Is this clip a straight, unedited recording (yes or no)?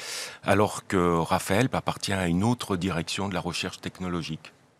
no